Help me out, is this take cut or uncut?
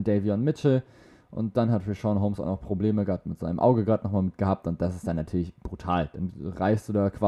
uncut